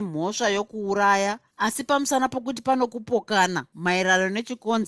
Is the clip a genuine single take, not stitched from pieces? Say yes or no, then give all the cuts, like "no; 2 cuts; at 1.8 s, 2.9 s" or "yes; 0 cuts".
no; 1 cut; at 1.5 s